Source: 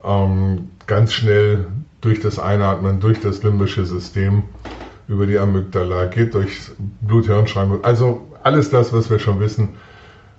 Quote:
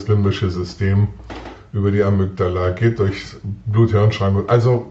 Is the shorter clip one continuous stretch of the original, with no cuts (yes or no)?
yes